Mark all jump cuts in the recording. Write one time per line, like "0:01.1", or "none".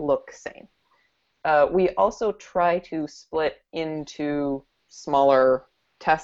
0:01.3